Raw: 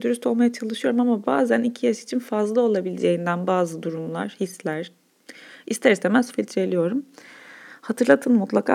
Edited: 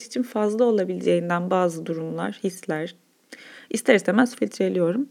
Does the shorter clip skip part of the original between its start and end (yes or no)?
no